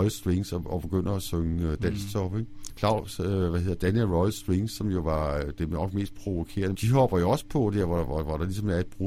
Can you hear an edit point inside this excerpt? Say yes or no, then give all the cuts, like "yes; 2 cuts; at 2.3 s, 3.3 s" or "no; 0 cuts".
yes; 2 cuts; at 2.7 s, 6.7 s